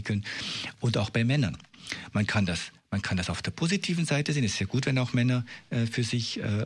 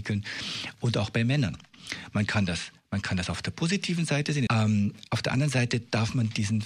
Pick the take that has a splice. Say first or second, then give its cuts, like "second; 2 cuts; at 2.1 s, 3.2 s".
second; 1 cut; at 4.5 s